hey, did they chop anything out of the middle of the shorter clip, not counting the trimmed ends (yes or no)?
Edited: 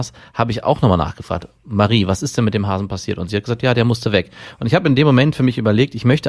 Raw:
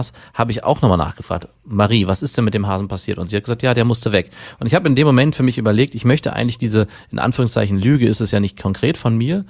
no